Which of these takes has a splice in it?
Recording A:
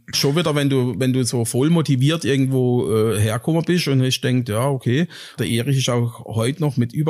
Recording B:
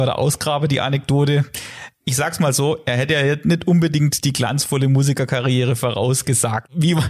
A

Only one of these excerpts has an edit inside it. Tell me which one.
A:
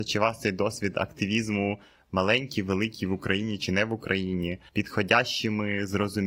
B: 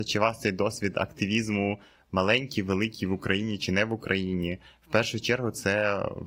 A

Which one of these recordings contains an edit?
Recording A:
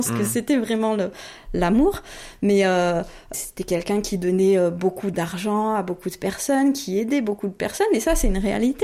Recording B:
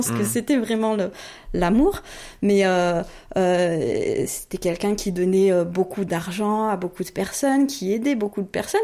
A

